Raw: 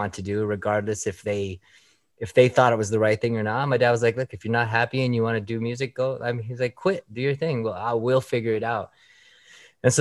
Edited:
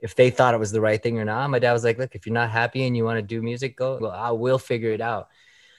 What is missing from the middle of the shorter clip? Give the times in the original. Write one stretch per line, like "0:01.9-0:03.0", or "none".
0:06.2-0:07.6